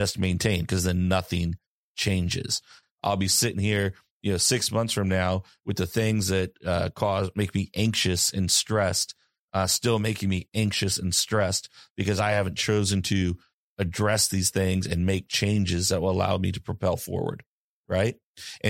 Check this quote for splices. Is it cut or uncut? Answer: cut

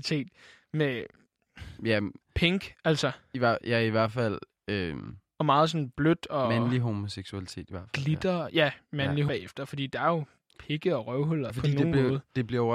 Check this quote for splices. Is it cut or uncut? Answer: cut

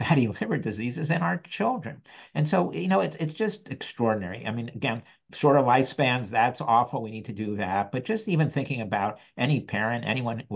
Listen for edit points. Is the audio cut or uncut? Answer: uncut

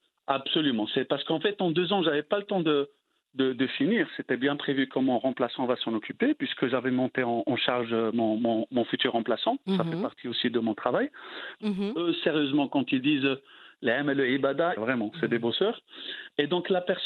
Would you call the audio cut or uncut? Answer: cut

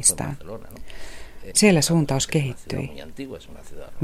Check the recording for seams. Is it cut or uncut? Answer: cut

